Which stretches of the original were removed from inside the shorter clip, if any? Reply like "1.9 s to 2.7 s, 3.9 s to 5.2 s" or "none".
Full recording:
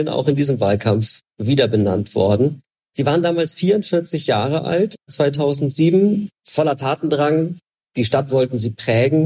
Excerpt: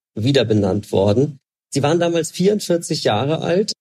none

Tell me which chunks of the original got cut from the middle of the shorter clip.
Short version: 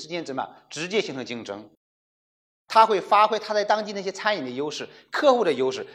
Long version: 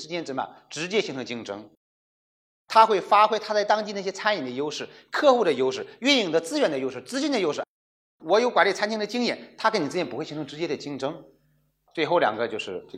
none

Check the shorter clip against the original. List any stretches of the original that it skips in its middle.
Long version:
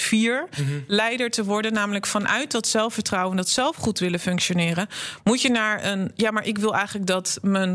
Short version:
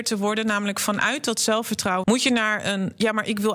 3.3 s to 5.2 s

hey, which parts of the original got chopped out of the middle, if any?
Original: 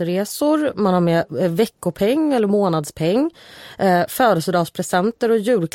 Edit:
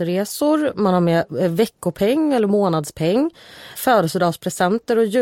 3.7 s to 4.1 s

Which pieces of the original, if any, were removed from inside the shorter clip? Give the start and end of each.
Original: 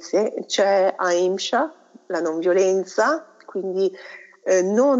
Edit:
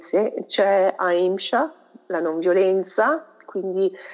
none

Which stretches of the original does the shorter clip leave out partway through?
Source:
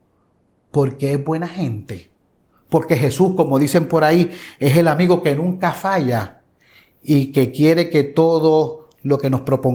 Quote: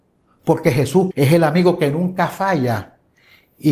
3.4 s to 4.5 s

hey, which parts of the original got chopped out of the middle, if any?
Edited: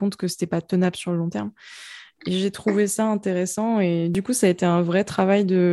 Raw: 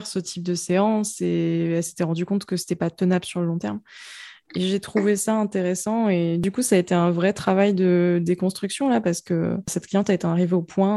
none

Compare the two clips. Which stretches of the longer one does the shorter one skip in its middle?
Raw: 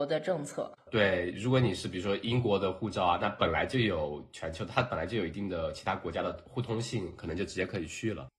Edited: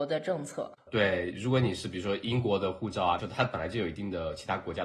3.2 s to 4.6 s

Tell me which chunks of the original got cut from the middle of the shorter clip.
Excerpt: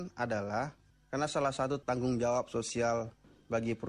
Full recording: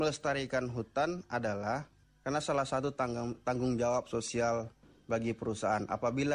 3.0 s to 3.4 s

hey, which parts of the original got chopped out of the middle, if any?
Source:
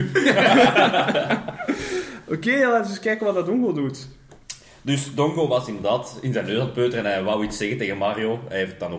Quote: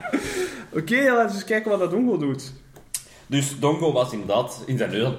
none

